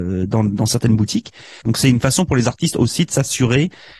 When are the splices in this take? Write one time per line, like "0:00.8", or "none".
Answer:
0:01.6